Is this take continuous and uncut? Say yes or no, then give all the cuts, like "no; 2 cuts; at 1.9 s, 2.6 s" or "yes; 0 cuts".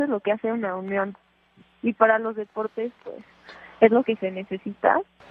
yes; 0 cuts